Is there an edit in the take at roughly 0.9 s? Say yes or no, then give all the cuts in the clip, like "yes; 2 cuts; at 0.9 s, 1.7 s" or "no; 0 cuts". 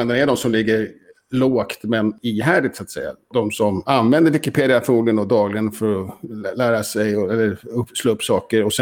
no; 0 cuts